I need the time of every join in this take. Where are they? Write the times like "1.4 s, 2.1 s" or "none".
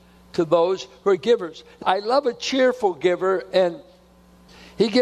1.8 s